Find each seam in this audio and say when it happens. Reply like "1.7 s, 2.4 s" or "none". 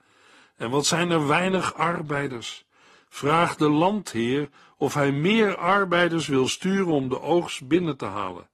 none